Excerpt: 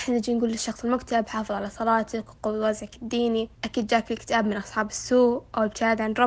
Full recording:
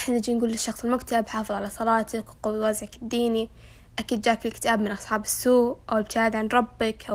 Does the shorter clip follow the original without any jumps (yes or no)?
no